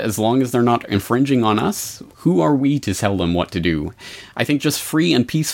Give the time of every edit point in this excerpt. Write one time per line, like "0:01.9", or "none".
0:02.1
0:04.3